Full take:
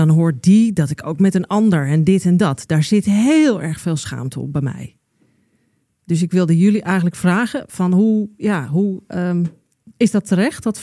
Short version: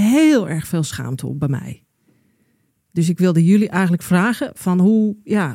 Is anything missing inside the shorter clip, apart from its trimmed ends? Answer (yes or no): no